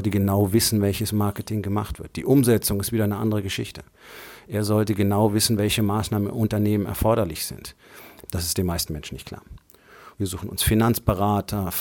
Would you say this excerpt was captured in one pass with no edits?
no; 2 cuts; at 8.3 s, 10.1 s

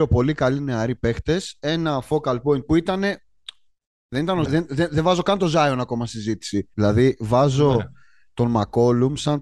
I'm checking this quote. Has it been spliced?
yes; 2 cuts; at 4.5 s, 6.7 s

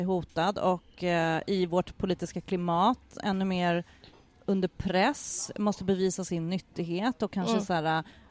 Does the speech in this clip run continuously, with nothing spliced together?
yes; 0 cuts

